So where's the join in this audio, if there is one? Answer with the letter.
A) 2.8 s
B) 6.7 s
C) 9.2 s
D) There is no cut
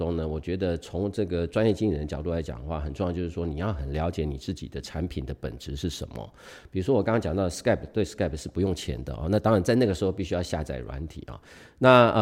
D